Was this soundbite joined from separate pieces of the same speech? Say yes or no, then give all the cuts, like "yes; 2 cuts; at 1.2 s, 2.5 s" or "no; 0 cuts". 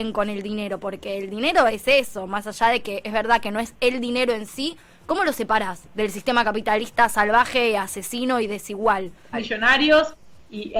yes; 2 cuts; at 1.7 s, 9.3 s